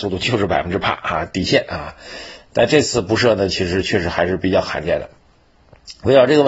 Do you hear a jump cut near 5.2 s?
no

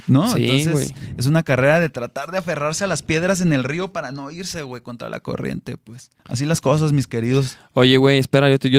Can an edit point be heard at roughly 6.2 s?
yes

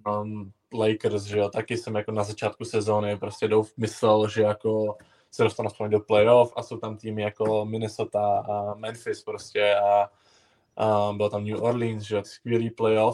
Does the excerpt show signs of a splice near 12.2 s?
yes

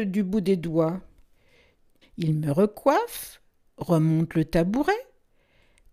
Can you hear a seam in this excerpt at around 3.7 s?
no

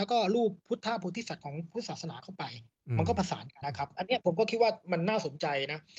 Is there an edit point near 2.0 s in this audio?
no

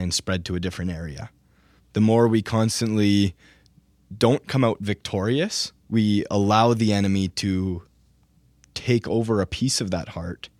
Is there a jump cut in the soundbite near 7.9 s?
no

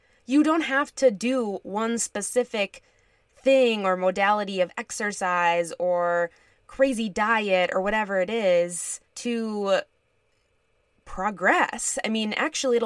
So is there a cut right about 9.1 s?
yes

